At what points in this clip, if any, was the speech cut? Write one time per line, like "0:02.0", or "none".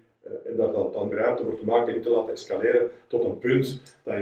0:01.1